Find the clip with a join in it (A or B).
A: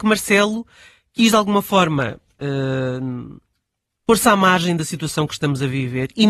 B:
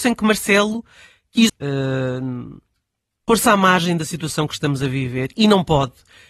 B